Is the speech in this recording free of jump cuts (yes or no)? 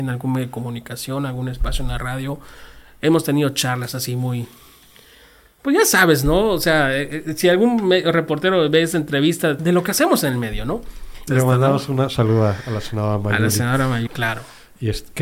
no